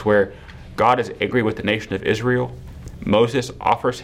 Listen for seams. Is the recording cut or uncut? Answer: uncut